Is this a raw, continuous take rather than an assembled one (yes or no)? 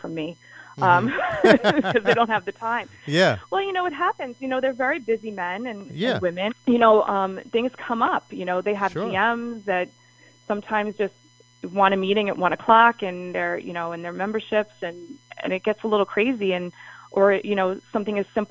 no